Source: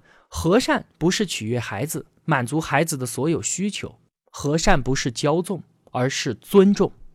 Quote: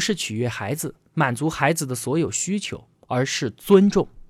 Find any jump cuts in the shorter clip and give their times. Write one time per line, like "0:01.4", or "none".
0:02.9